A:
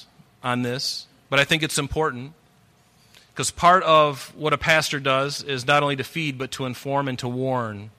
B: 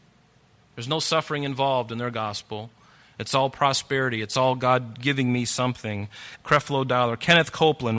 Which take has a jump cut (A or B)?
B